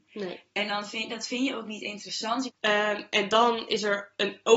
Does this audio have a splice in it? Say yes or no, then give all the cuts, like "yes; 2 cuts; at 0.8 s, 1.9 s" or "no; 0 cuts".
yes; 1 cut; at 2.5 s